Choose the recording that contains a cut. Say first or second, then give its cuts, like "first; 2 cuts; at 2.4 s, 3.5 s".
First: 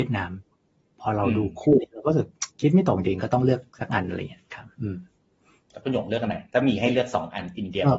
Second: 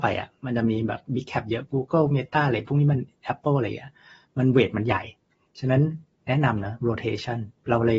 first; 1 cut; at 2.5 s